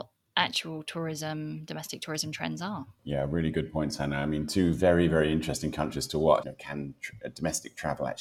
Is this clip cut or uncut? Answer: cut